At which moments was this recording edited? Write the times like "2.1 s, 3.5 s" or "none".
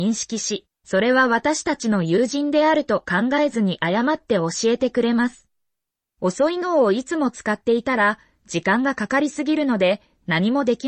6.0 s